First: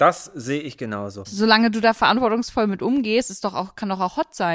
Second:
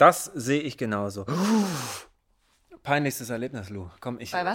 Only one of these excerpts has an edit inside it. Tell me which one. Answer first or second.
first